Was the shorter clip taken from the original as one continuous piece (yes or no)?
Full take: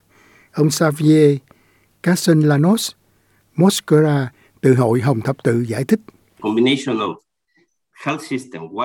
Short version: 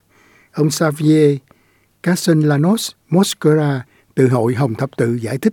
no